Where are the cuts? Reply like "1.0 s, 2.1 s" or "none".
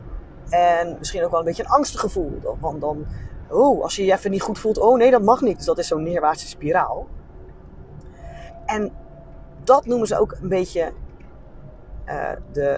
5.6 s